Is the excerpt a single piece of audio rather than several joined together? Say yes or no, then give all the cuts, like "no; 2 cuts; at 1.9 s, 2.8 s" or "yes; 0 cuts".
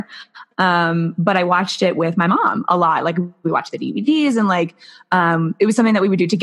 yes; 0 cuts